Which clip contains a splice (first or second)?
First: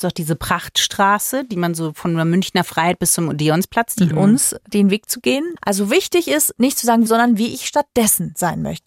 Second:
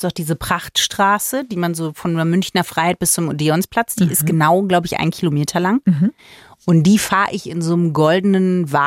first